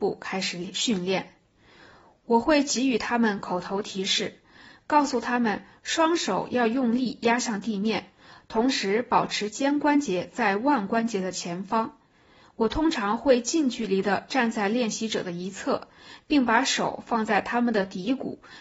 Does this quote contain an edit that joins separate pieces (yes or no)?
no